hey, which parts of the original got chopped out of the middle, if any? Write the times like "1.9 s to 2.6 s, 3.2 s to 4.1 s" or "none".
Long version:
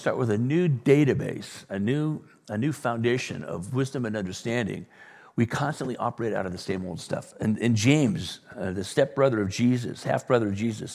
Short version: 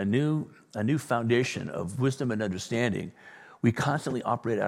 none